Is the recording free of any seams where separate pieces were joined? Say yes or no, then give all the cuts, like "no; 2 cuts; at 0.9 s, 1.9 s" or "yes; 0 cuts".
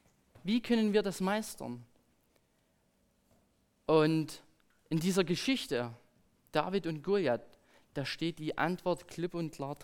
yes; 0 cuts